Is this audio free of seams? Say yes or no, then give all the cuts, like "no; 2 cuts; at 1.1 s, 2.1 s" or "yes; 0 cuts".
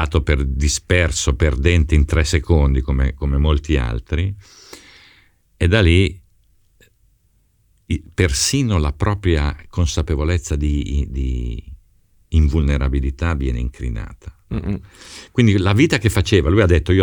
yes; 0 cuts